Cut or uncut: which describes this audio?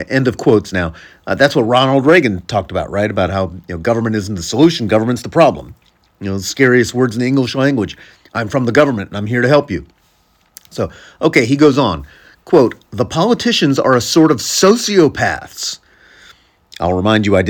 uncut